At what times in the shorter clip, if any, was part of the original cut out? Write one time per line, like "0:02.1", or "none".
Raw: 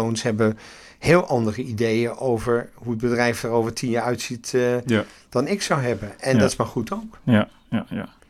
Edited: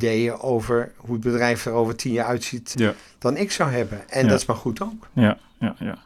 0:02.7

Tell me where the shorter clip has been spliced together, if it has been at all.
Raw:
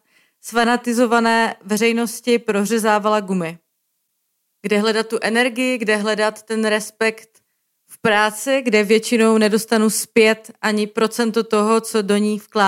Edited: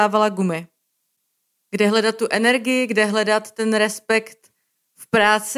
none

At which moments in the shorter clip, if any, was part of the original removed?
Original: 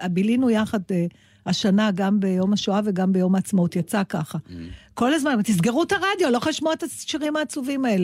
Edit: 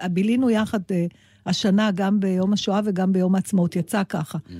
none

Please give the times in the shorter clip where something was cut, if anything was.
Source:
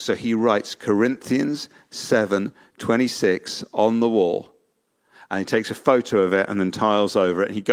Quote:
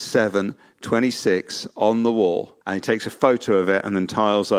0:02.6

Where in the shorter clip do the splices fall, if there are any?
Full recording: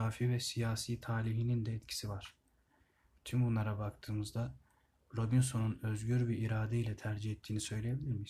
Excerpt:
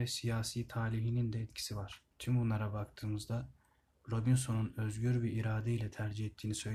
0:02.1

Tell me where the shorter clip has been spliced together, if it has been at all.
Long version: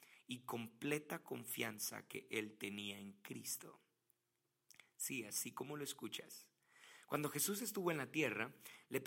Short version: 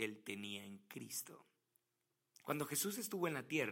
0:02.4

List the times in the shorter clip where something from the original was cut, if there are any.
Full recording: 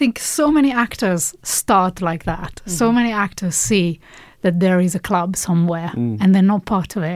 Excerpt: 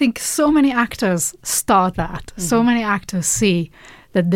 0:01.9

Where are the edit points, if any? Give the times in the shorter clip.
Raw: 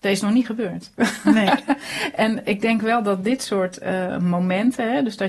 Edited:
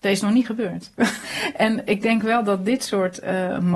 0:01.2

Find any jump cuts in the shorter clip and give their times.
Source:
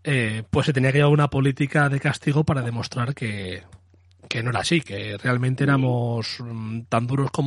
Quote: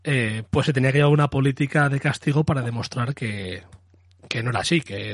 none

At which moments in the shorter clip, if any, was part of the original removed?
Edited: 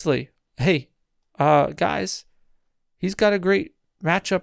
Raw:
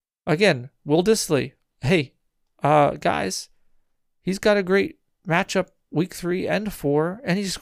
none

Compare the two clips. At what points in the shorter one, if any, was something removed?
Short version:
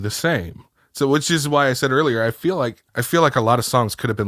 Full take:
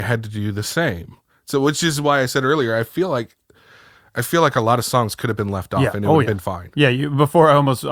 0:02.9

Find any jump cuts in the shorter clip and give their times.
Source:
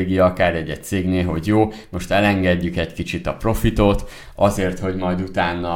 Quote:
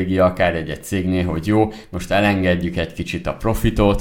none

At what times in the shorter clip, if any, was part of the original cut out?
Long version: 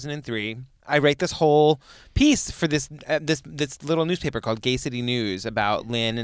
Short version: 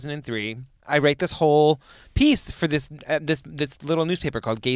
none

